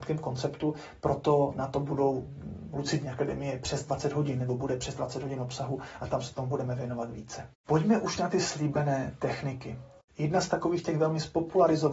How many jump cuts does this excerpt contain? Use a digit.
0